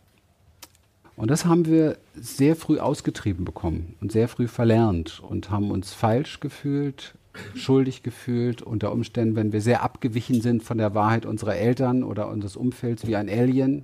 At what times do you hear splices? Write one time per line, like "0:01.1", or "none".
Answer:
0:01.0